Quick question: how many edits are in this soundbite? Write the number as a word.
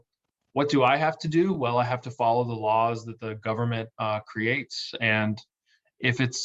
zero